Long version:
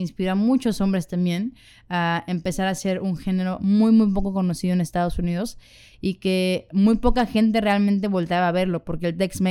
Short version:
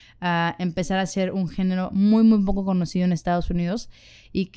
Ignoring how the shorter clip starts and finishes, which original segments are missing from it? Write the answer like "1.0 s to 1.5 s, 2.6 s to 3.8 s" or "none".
none